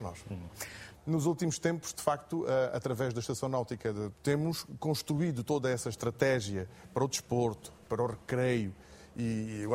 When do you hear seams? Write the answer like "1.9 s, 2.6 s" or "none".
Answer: 0.9 s, 4.1 s